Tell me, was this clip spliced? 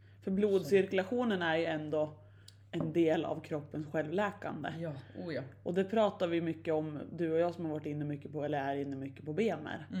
no; 0 cuts

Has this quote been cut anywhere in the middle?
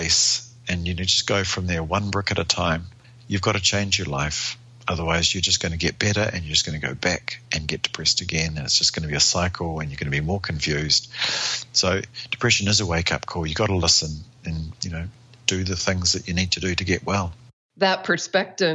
yes; 1 cut; at 14.7 s

